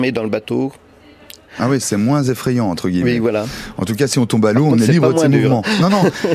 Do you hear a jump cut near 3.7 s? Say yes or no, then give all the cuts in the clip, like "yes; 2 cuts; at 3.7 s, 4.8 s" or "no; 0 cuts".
no; 1 cut; at 1.5 s